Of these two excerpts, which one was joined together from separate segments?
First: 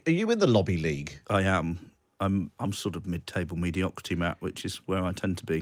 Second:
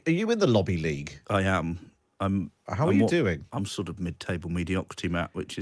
first; 1 cut; at 2.6 s

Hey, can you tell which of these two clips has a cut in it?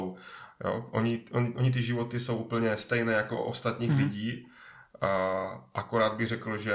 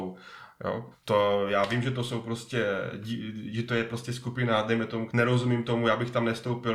second; 2 cuts; at 0.9 s, 5.1 s

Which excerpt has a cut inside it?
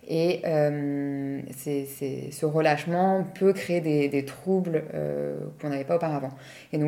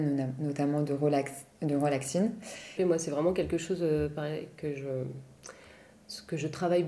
second; 1 cut; at 2.8 s

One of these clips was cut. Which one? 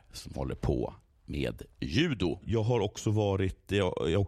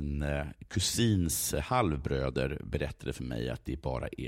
first; 1 cut; at 2.4 s

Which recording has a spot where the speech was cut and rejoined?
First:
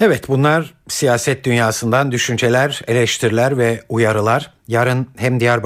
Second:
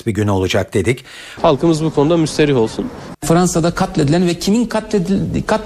second; 2 cuts; at 1.4 s, 3.1 s

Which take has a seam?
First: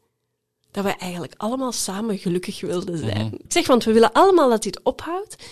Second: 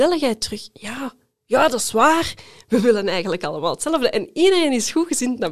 first; 1 cut; at 3.5 s

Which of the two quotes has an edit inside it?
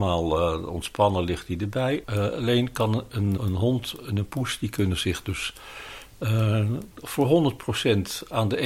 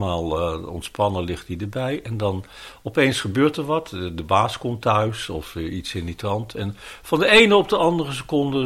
first; 2 cuts; at 2.0 s, 3.4 s

